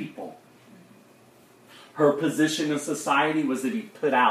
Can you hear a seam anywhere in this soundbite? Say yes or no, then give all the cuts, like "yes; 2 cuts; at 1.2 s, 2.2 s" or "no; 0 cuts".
no; 0 cuts